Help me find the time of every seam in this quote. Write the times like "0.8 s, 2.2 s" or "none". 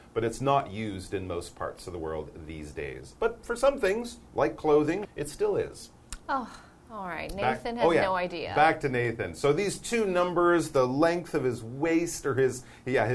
5.0 s